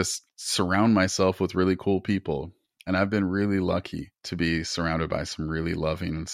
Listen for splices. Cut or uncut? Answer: uncut